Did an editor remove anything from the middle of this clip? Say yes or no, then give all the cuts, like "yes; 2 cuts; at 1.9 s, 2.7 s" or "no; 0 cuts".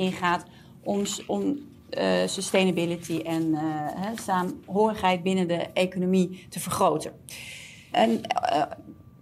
yes; 1 cut; at 7.9 s